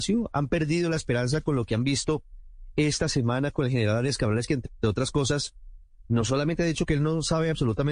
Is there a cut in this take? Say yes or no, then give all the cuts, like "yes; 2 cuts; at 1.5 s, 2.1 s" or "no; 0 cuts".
no; 0 cuts